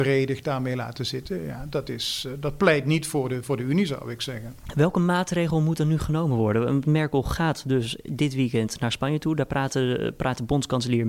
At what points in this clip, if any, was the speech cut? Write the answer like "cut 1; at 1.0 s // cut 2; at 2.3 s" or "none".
none